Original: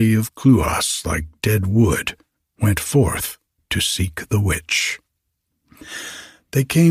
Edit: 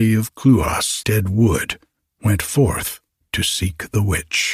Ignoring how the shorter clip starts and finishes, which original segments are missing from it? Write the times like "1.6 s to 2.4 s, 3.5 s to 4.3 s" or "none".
1.0 s to 1.4 s